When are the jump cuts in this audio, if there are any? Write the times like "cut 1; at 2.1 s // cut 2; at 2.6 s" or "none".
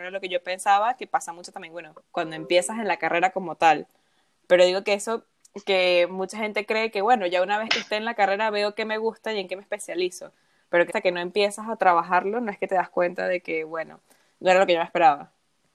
cut 1; at 10.9 s